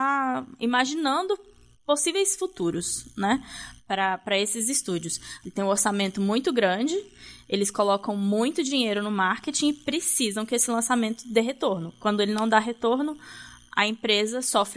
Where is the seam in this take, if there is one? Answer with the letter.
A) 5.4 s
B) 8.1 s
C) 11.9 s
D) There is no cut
A